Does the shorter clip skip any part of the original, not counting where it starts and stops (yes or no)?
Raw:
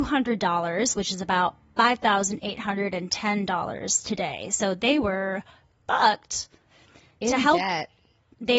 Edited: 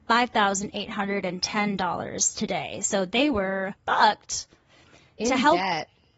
yes